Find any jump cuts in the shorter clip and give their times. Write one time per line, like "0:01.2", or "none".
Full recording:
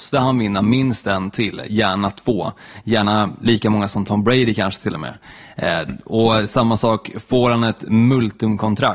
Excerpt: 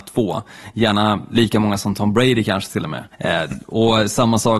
0:03.1